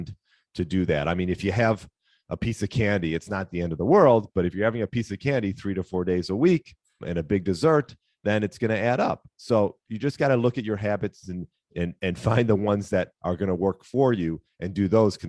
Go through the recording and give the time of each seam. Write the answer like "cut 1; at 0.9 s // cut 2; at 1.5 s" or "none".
cut 1; at 7.0 s